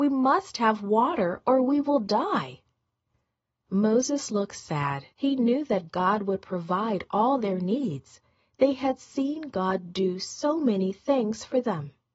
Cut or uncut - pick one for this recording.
cut